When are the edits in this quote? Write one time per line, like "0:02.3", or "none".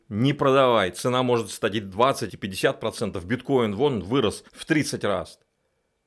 0:02.3
0:04.5